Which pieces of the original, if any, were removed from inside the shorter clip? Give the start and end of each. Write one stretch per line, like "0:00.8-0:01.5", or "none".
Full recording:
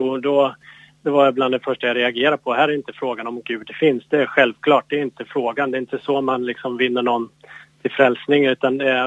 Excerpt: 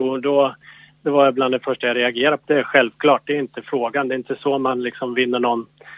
0:02.5-0:04.1